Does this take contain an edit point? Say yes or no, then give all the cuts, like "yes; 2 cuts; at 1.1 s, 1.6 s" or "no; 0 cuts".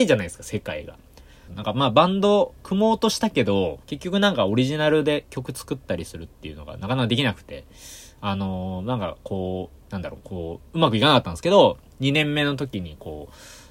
yes; 3 cuts; at 1.5 s, 3.8 s, 9.8 s